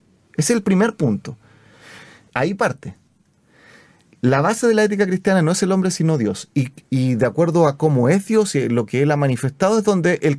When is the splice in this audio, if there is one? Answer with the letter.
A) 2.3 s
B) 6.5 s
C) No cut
A